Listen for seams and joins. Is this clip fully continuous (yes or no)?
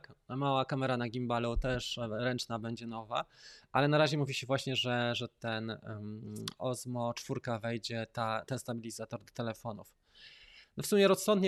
yes